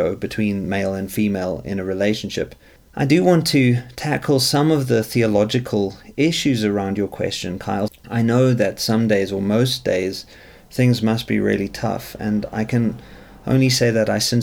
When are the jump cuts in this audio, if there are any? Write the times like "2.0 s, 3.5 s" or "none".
2.8 s, 7.9 s